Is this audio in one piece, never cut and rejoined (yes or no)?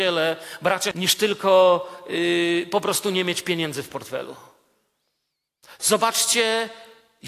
no